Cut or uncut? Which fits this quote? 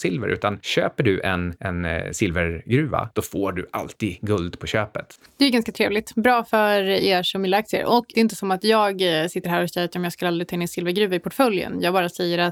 cut